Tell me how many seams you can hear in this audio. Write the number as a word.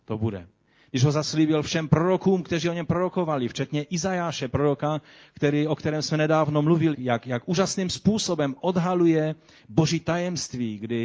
one